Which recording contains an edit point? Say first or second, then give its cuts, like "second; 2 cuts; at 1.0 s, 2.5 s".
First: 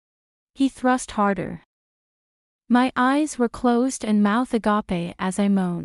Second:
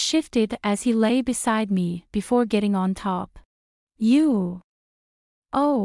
second; 1 cut; at 3.8 s